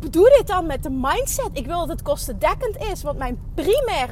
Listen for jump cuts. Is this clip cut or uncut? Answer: uncut